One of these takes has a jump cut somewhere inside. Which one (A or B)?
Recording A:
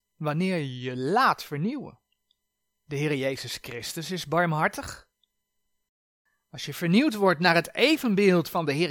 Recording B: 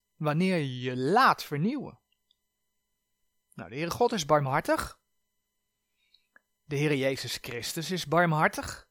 A